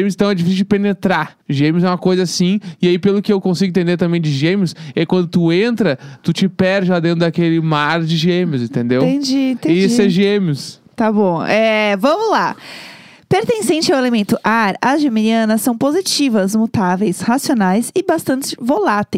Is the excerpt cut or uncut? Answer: cut